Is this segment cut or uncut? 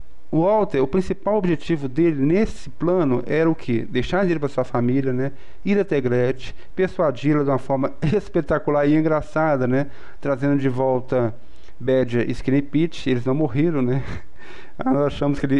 uncut